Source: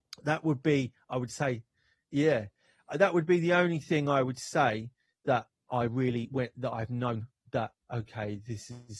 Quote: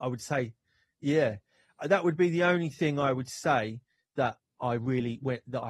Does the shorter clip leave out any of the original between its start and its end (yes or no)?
no